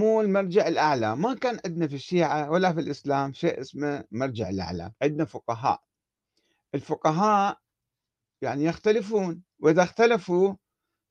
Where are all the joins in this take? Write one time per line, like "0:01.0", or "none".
0:05.0